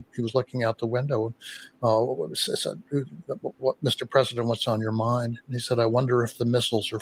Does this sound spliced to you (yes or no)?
no